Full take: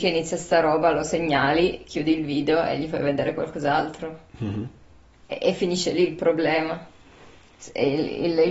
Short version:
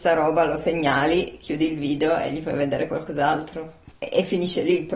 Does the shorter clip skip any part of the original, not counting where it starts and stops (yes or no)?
yes